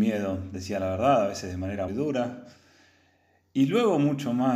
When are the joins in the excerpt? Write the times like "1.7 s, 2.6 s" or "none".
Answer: 1.9 s

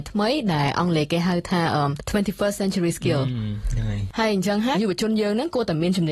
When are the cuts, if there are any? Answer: 4.7 s

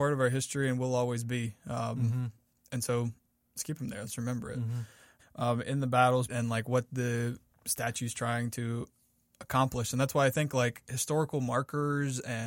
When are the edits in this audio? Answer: 5.2 s, 6.3 s

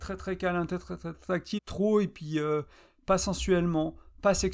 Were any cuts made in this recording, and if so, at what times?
1.6 s

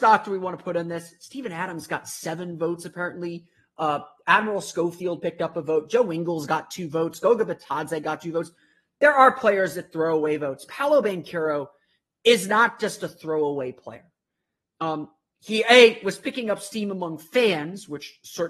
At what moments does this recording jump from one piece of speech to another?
10.7 s

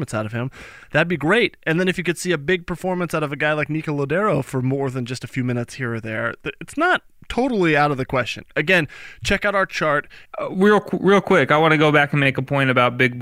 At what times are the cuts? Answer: 10.2 s

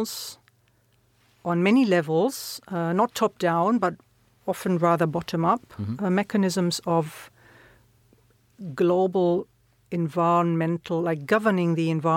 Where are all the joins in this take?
none

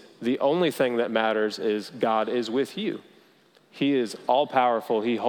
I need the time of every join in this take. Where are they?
none

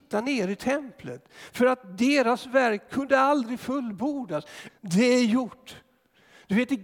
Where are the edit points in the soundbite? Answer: 4.7 s

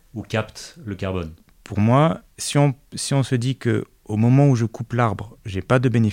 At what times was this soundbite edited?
none

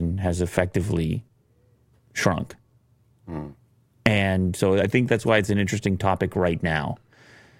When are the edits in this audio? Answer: none

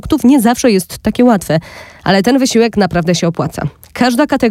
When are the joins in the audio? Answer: none

